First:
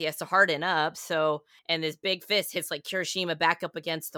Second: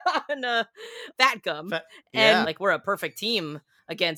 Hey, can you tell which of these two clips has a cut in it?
second; 2 cuts; at 1.1 s, 2.4 s

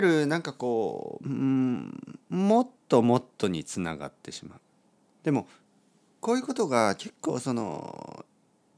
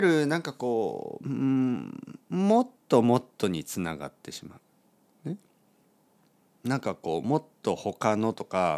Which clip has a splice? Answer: first; 1 cut; at 5.2 s

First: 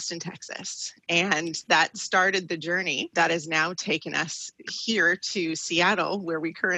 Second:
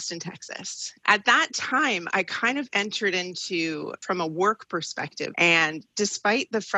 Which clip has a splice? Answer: second; 2 cuts; at 1.0 s, 5.3 s

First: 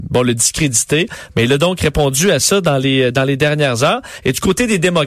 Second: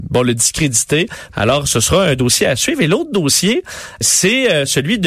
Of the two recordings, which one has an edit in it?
second; 2 cuts; at 1.3 s, 4.0 s

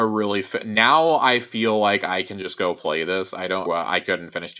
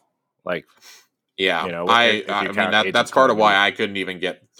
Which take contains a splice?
first; 1 cut; at 3.7 s

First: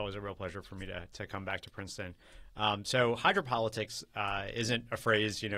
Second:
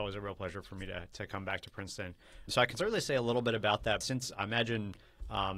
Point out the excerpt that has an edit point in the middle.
second; 2 cuts; at 2.5 s, 4.0 s

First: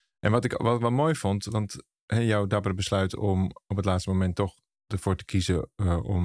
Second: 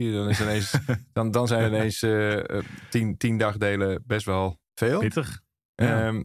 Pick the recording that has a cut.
second; 1 cut; at 4.7 s

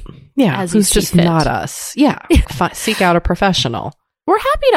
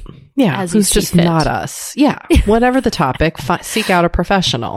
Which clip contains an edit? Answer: first; 1 cut; at 2.4 s

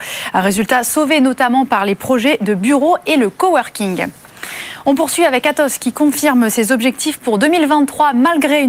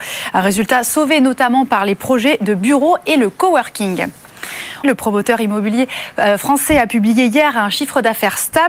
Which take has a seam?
second; 1 cut; at 4.8 s

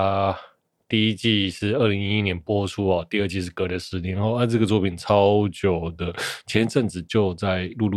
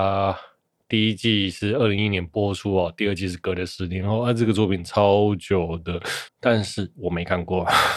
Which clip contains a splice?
second; 2 cuts; at 2.0 s, 6.3 s

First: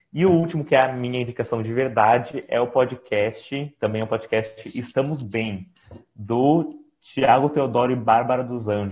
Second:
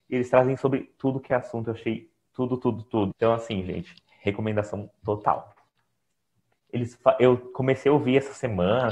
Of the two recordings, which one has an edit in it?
second; 2 cuts; at 3.1 s, 6.5 s

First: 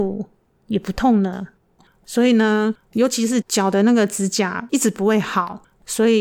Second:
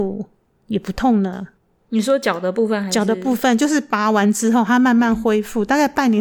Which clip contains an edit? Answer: first; 2 cuts; at 1.8 s, 3.4 s

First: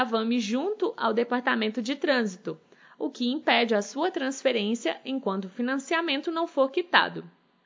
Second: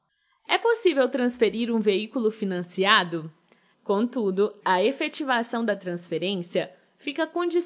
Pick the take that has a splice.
second; 1 cut; at 3.7 s

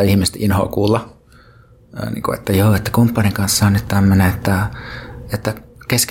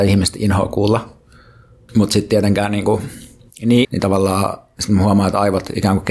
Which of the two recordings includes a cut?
second; 2 cuts; at 1.9 s, 3.8 s

